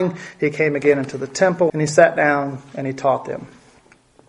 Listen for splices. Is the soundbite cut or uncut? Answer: cut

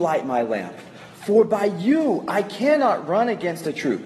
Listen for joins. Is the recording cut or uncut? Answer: cut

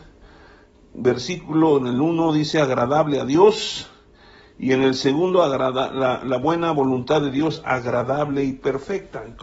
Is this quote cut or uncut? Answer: uncut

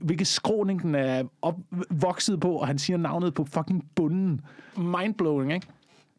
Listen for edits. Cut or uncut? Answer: cut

